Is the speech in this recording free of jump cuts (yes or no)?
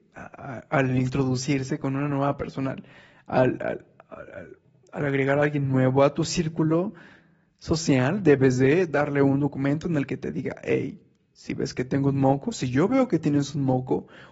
yes